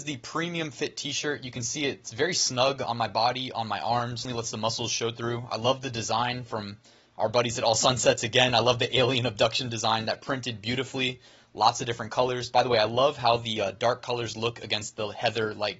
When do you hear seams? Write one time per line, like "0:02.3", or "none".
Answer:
0:04.3